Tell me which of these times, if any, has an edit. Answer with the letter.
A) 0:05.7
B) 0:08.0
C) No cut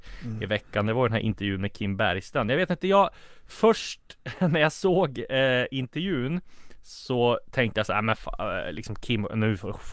C